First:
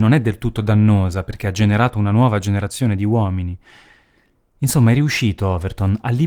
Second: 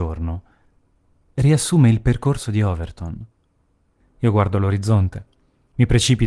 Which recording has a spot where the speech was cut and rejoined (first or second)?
second